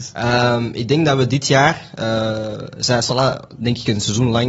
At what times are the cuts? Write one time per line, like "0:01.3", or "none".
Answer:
none